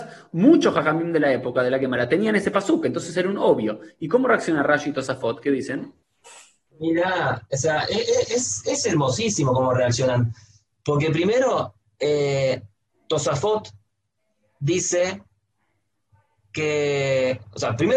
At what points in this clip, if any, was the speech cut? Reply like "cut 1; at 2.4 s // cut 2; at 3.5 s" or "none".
none